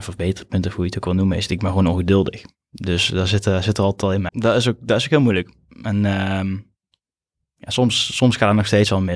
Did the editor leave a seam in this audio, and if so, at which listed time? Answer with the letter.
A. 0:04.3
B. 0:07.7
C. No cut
A